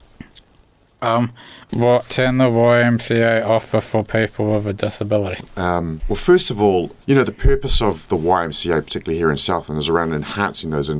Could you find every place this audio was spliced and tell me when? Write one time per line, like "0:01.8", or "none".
0:07.0